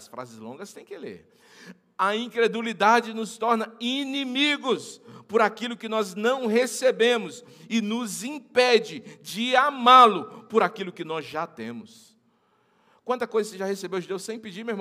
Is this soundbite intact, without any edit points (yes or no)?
yes